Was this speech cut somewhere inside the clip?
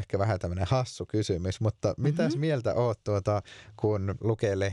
no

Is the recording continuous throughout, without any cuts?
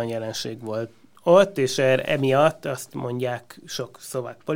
no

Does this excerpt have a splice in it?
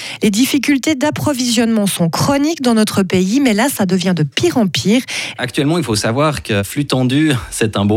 yes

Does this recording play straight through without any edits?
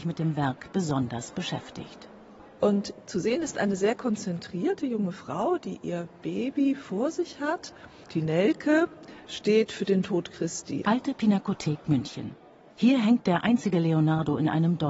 no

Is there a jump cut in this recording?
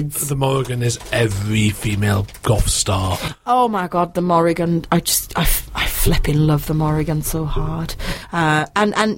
no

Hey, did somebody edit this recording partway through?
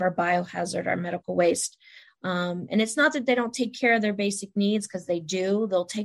yes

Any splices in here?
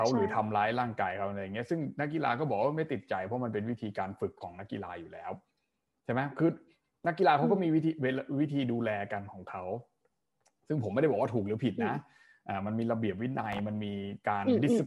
no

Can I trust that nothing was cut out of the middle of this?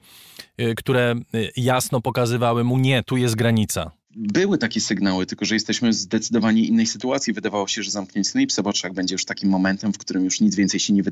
yes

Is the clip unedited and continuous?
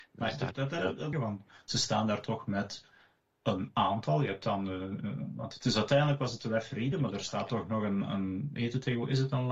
no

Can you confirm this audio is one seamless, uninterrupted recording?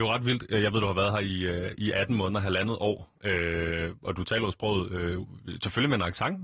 yes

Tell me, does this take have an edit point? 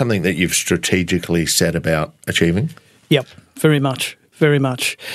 no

